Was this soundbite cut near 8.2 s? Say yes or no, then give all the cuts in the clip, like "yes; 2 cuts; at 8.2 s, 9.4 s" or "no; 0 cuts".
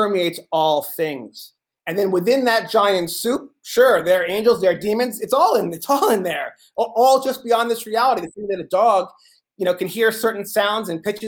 no; 0 cuts